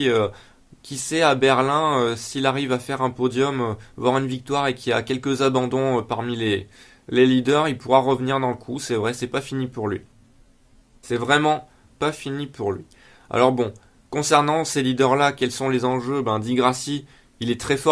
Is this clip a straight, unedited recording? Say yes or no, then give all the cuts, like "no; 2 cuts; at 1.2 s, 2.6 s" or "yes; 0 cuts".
yes; 0 cuts